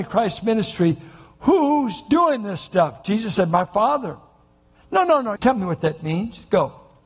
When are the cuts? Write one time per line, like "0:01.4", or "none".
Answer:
0:05.4